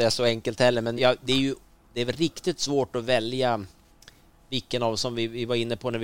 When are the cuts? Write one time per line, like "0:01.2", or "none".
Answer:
0:01.0